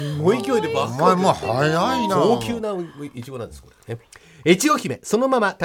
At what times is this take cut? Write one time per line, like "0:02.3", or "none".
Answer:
none

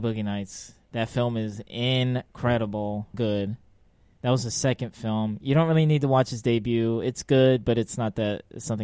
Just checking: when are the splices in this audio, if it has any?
0:03.1

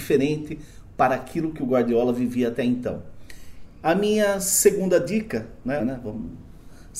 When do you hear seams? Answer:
0:03.6
0:05.8

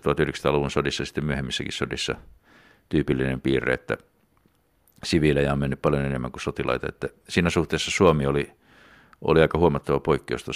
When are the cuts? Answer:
none

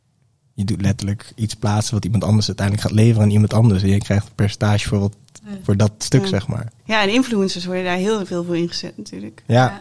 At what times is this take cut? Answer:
0:06.8

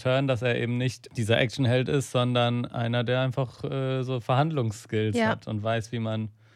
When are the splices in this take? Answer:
none

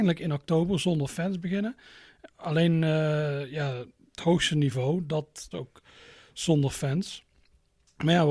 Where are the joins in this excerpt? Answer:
0:05.5

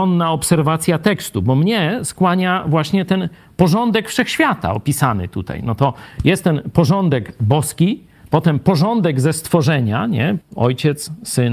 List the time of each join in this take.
0:10.4

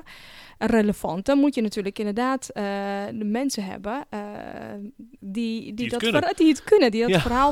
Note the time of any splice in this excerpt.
0:05.2

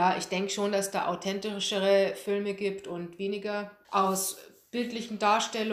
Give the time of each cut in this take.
0:03.8

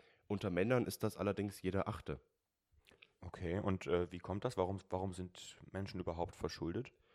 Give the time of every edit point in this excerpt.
none

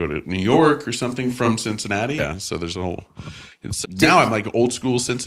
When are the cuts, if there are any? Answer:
0:02.2
0:03.8

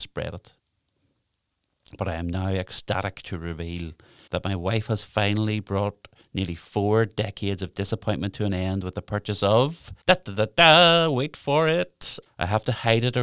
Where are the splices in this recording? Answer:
0:04.3
0:10.0
0:12.3

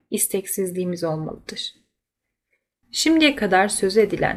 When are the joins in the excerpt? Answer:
0:02.8

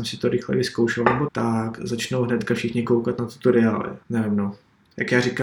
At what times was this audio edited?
0:01.3
0:04.0

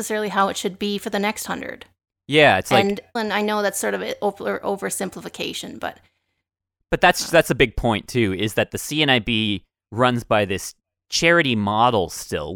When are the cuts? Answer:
0:03.2

